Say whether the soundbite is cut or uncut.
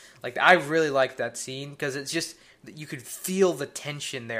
uncut